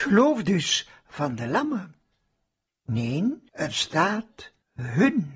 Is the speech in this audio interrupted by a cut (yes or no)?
no